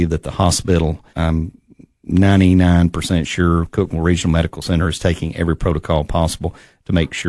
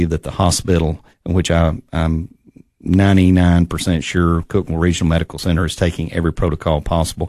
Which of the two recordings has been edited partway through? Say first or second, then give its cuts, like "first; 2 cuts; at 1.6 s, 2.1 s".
first; 1 cut; at 1.1 s